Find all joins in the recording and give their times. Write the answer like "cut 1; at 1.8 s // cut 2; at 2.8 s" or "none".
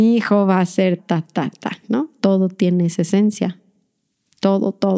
cut 1; at 1.0 s // cut 2; at 2.2 s

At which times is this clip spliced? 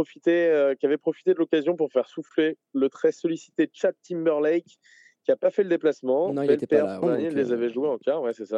cut 1; at 7.0 s

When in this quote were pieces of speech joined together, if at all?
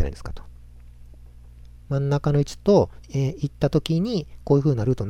cut 1; at 1.9 s // cut 2; at 3.0 s

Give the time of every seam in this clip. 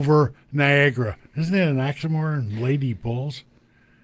none

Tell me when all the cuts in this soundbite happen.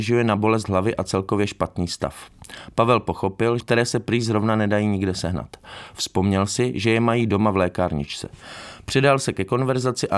cut 1; at 3.6 s

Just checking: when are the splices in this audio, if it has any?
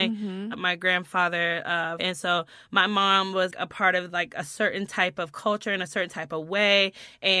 cut 1; at 2.0 s // cut 2; at 3.5 s

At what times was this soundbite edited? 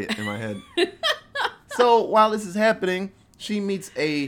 none

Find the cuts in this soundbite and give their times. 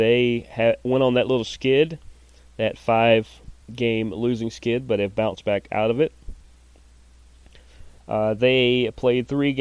cut 1; at 3.6 s // cut 2; at 8.0 s

